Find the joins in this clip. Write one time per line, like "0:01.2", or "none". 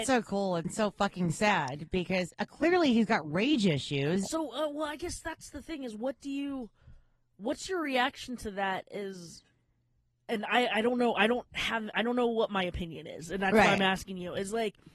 0:04.2